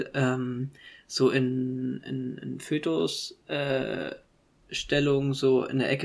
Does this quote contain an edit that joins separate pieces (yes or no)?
no